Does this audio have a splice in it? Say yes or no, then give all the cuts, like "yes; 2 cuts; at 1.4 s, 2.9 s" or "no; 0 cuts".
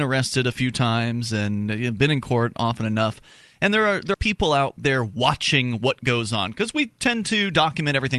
yes; 1 cut; at 4.1 s